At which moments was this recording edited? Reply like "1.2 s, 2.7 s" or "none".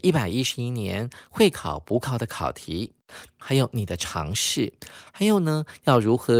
3.3 s

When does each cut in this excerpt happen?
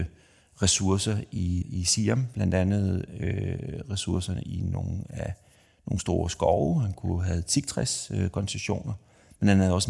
1.6 s

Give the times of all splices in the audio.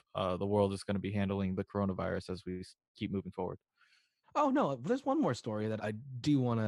4.2 s, 5.8 s

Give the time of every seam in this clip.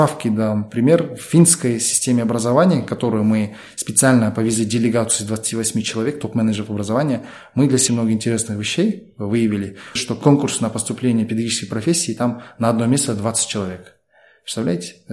7.9 s, 10.0 s

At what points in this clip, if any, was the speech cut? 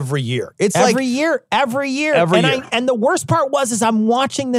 none

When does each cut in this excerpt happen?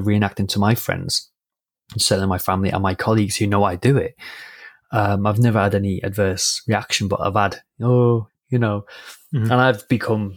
8.3 s

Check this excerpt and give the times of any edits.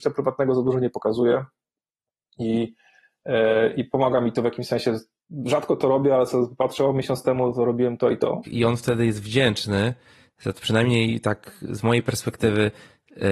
8.4 s

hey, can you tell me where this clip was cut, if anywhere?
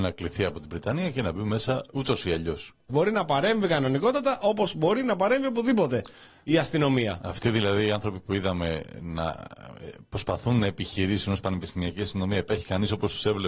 2.9 s

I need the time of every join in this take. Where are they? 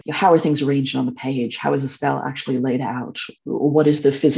none

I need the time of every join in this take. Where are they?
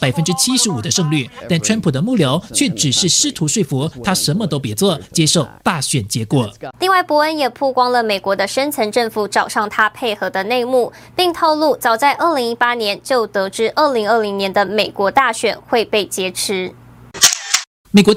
6.7 s

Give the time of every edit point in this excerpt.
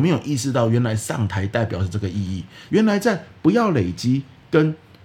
2.7 s

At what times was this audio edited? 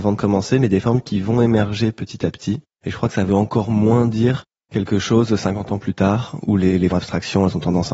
2.8 s, 6.9 s

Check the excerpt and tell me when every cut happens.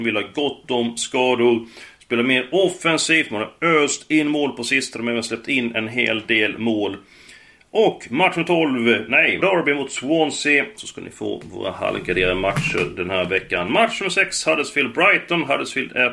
9.4 s, 10.7 s

